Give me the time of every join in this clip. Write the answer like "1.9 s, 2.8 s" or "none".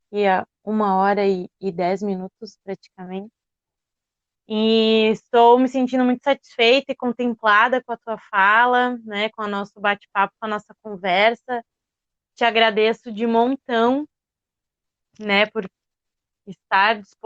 none